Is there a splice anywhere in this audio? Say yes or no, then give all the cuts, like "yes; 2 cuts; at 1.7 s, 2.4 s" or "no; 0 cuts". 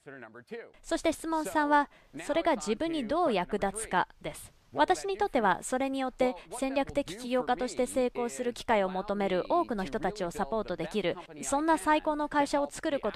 yes; 1 cut; at 4.6 s